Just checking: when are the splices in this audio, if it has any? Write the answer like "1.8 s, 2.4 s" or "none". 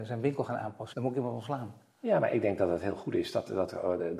0.9 s